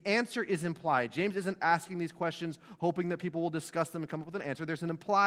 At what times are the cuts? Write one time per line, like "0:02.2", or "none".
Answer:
0:01.6